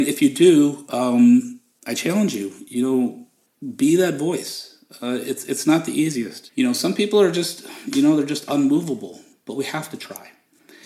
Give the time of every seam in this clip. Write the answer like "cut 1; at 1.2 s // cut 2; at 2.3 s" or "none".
cut 1; at 6.5 s